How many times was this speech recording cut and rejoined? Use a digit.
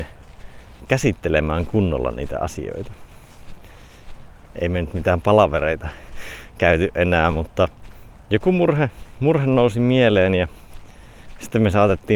1